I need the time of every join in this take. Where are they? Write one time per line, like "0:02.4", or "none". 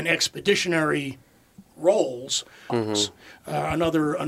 0:02.7